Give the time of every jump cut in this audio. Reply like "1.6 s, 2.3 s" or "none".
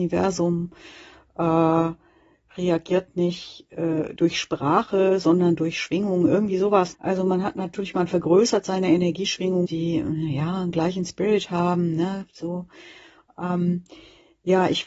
4.2 s, 6.9 s, 9.6 s